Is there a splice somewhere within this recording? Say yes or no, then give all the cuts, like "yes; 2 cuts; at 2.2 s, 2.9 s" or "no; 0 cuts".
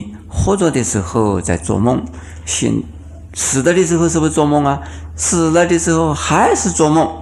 no; 0 cuts